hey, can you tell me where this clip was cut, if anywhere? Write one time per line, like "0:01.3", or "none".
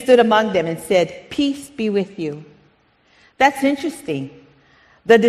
none